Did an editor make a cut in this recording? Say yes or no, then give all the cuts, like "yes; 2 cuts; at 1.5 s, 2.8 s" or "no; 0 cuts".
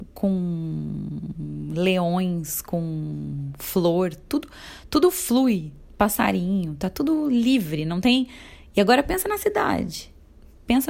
no; 0 cuts